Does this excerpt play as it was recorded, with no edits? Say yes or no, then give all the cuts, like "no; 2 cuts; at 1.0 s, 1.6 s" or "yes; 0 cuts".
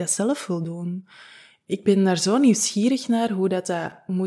yes; 0 cuts